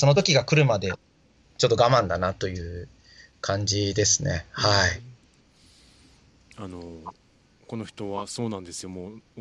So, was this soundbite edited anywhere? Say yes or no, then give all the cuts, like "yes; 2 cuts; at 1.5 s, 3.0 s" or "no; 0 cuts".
no; 0 cuts